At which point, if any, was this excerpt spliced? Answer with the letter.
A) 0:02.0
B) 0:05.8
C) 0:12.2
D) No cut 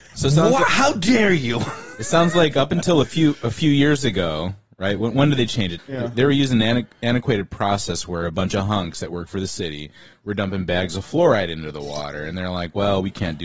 B